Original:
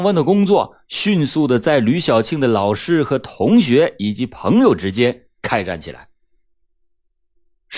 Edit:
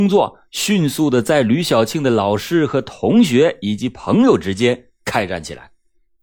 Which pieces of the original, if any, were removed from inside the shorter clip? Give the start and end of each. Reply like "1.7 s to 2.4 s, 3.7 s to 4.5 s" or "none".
none